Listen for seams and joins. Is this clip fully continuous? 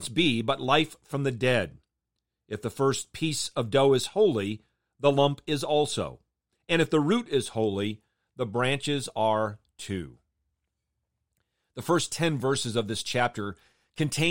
yes; 0 cuts

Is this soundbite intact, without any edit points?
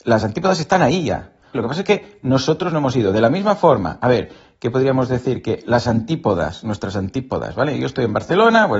no; 1 cut; at 1.5 s

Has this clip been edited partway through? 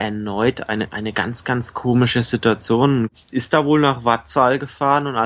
yes; 1 cut; at 3.1 s

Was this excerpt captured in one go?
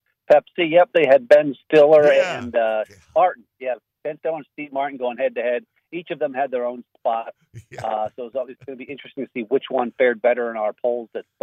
yes; 0 cuts

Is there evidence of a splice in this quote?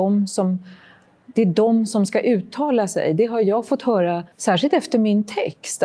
yes; 1 cut; at 4.3 s

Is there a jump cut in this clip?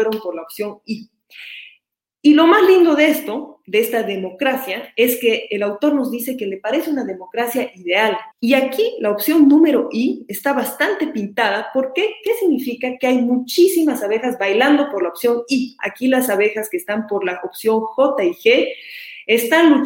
yes; 2 cuts; at 8.3 s, 15.8 s

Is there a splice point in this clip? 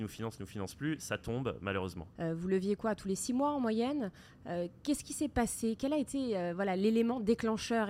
yes; 1 cut; at 2.1 s

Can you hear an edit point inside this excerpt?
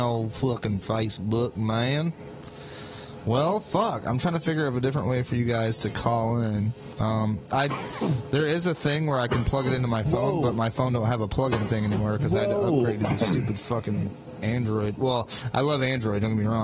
no; 0 cuts

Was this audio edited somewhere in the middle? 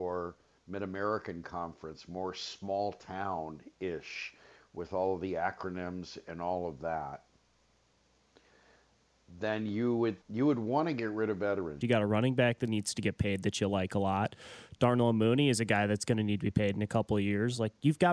yes; 2 cuts; at 10.2 s, 11.8 s

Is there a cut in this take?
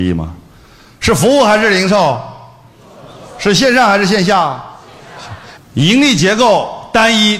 yes; 1 cut; at 5.6 s

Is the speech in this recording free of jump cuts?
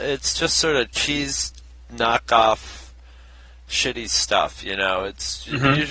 yes; 0 cuts

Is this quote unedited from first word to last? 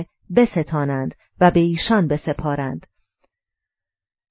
yes; 0 cuts

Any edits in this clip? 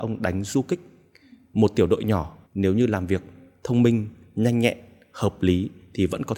yes; 1 cut; at 2.5 s

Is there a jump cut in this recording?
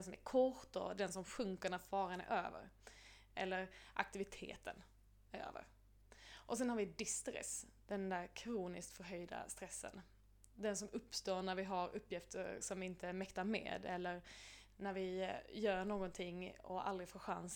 no; 0 cuts

